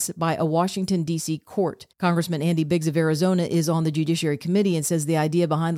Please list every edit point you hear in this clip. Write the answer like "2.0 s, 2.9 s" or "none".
1.9 s